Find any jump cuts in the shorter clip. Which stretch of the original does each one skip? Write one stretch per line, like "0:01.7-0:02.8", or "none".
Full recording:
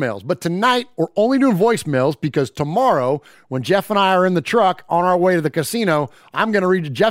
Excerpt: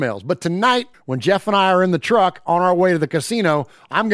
0:00.9-0:03.4